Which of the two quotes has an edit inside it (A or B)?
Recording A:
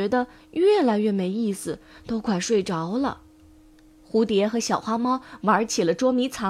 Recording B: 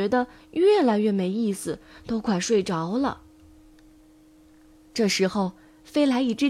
A